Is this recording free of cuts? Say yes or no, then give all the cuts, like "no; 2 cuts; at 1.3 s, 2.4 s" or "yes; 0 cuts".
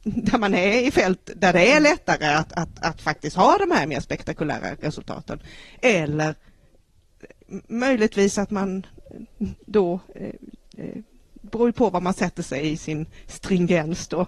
yes; 0 cuts